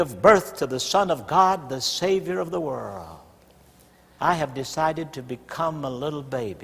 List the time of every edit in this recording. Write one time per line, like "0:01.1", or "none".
0:04.2